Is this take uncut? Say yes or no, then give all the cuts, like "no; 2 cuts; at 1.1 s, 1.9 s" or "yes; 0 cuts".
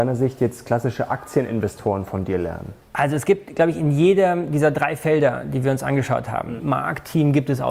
no; 2 cuts; at 2.8 s, 6.6 s